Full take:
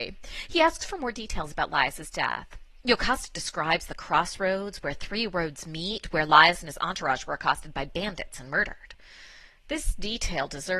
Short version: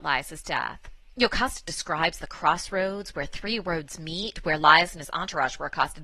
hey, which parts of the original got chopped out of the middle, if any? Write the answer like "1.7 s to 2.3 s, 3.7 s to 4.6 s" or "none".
none